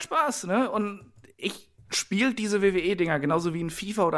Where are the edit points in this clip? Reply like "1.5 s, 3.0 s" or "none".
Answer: 1.8 s